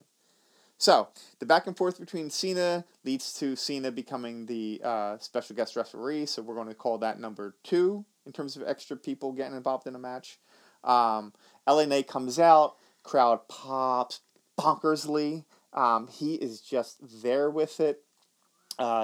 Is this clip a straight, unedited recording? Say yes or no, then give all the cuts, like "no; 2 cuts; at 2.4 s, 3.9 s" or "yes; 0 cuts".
yes; 0 cuts